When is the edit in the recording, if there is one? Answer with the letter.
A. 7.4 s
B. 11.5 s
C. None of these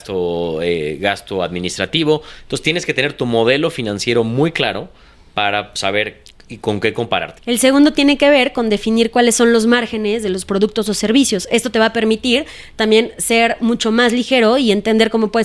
A